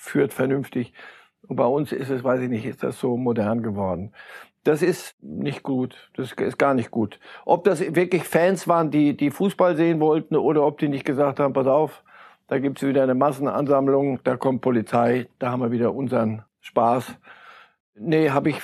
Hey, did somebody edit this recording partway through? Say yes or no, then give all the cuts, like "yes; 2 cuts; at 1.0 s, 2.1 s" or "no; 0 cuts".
no; 0 cuts